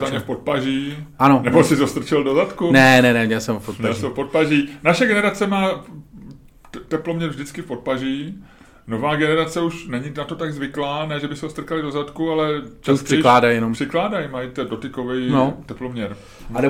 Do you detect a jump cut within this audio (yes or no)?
no